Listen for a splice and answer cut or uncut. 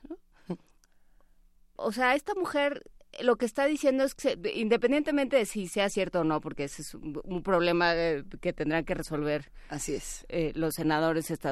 uncut